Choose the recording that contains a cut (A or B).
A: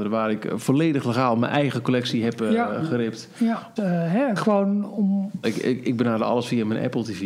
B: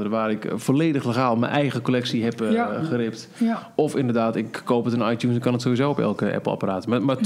A